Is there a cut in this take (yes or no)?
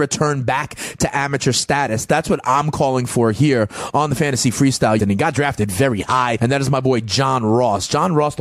yes